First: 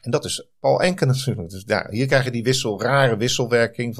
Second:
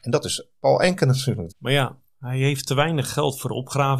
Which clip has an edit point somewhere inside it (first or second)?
second